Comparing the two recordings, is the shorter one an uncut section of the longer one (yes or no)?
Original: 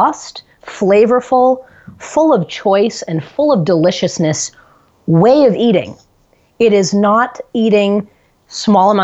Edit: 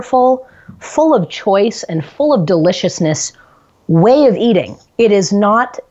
no